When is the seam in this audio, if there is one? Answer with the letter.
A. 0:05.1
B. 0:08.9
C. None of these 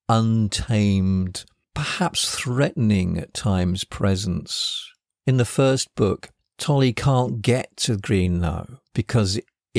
B